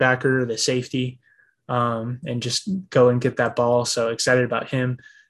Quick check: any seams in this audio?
no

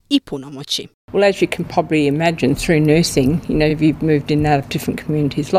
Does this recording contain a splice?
no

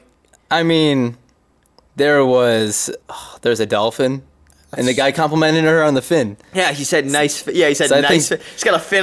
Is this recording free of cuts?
no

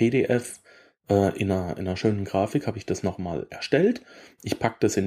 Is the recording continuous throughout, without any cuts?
yes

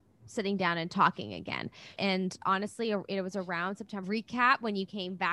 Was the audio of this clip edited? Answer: yes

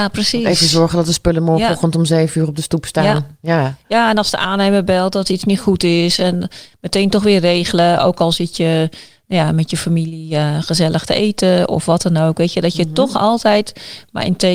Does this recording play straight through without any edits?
yes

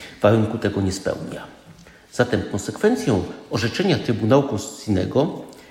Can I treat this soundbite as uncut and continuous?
yes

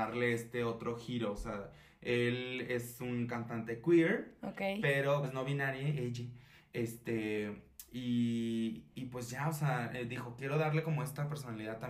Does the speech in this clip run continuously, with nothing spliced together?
no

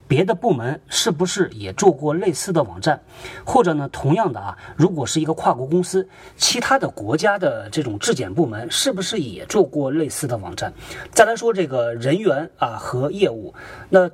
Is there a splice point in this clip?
yes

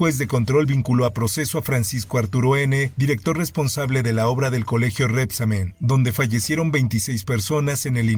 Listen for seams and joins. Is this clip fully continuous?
yes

